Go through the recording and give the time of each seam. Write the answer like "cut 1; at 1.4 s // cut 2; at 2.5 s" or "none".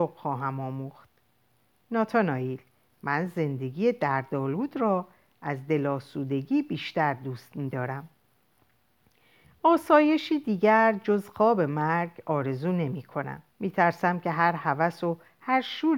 cut 1; at 13.5 s